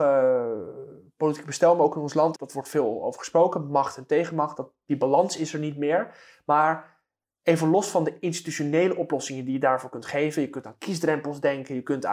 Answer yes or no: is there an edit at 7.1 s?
no